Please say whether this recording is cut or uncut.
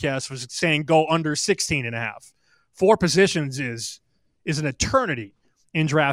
uncut